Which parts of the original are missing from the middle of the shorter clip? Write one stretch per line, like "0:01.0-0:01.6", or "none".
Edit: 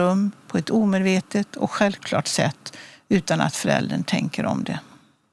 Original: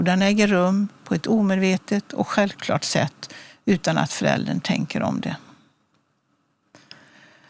none